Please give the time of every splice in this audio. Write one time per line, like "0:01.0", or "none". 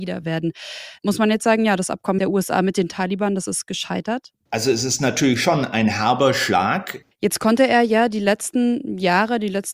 0:07.1